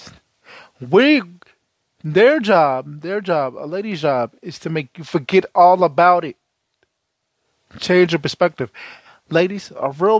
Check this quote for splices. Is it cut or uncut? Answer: uncut